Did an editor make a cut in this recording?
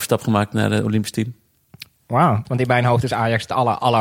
yes; 1 cut; at 2.4 s

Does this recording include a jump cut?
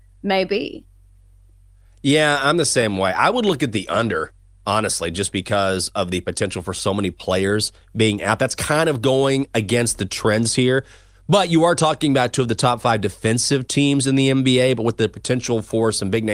no; 0 cuts

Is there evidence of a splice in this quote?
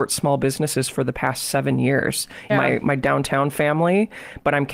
yes; 1 cut; at 2.5 s

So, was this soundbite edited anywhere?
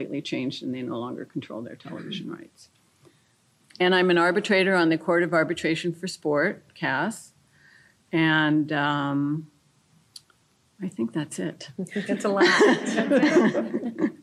yes; 1 cut; at 3.6 s

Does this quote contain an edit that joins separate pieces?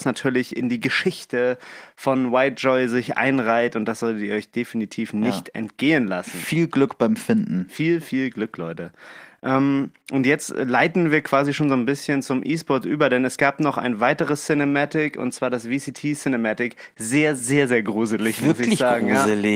yes; 1 cut; at 17.4 s

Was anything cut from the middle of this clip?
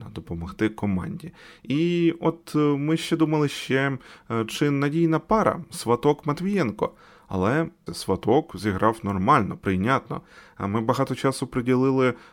yes; 1 cut; at 7.9 s

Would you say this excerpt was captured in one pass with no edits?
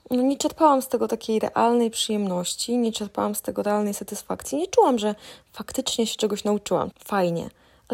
no; 1 cut; at 6.9 s

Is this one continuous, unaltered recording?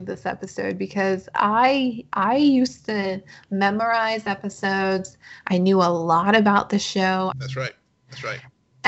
no; 2 cuts; at 5.4 s, 7.3 s

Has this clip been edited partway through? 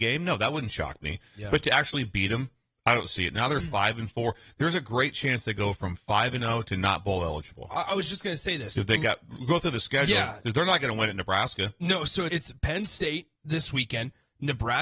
yes; 2 cuts; at 12.3 s, 13.3 s

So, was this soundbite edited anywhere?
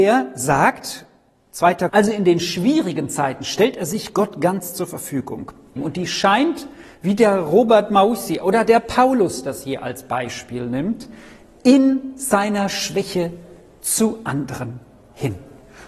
yes; 2 cuts; at 1.9 s, 5.8 s

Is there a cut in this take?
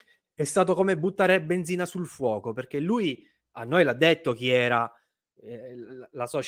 no; 0 cuts

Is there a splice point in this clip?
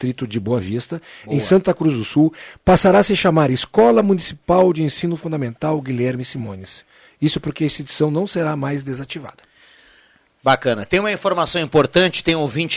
no; 0 cuts

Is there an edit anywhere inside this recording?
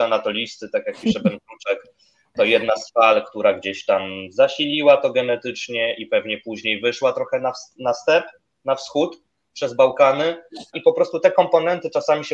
yes; 1 cut; at 10.7 s

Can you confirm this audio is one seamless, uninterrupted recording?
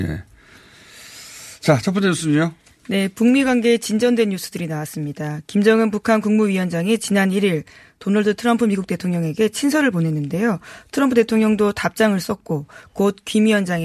yes; 0 cuts

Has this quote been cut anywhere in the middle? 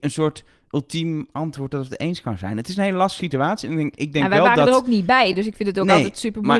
no; 0 cuts

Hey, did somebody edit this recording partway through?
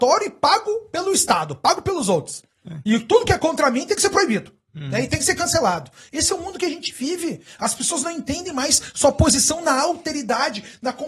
no; 0 cuts

